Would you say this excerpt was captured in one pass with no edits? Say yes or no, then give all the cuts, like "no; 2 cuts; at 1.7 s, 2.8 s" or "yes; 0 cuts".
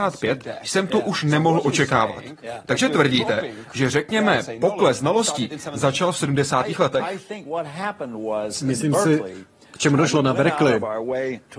yes; 0 cuts